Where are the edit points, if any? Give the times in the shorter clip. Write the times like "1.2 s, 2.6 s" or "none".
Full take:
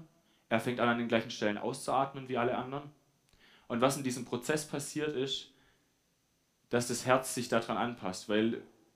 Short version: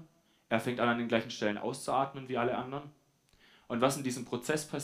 none